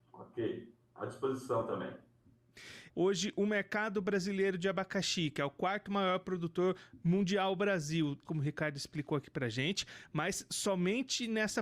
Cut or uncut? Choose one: cut